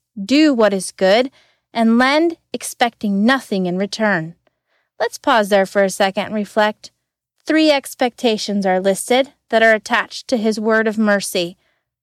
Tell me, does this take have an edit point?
no; 0 cuts

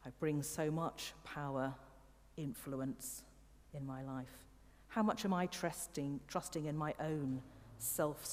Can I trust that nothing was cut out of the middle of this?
yes; 0 cuts

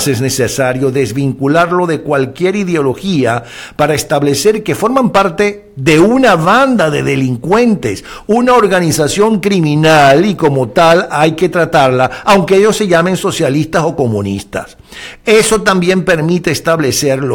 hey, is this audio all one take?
yes; 0 cuts

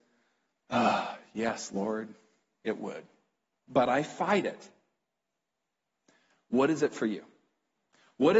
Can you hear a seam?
no; 0 cuts

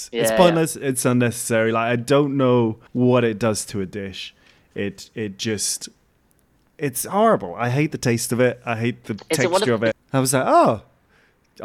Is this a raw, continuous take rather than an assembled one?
no; 2 cuts; at 2.9 s, 9.9 s

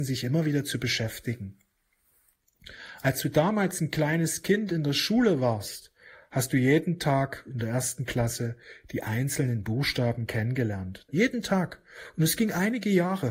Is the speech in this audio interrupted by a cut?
yes; 1 cut; at 11.1 s

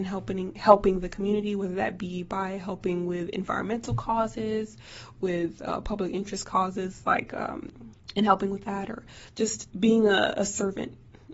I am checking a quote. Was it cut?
yes; 2 cuts; at 7.9 s, 9.7 s

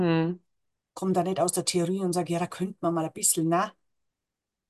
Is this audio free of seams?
yes; 0 cuts

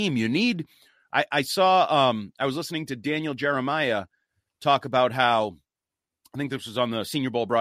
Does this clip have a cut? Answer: no; 0 cuts

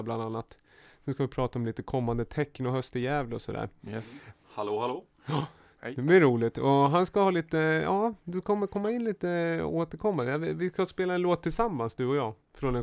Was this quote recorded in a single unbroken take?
no; 1 cut; at 4.3 s

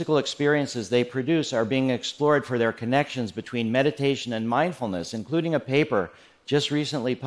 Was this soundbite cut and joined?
no; 0 cuts

